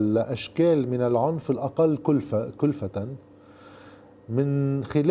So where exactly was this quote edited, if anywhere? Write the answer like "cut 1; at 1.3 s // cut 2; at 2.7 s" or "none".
none